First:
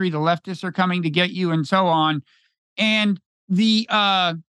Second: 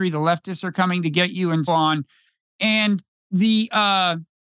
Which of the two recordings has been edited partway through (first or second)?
second